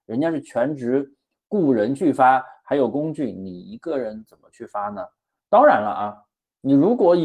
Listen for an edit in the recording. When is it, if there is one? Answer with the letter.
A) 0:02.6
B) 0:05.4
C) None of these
B